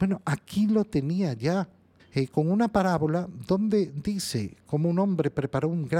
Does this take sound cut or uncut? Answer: cut